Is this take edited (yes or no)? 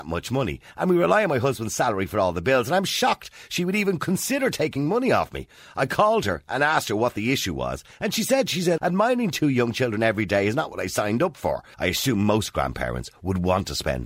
yes